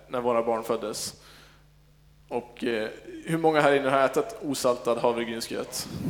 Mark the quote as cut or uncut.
uncut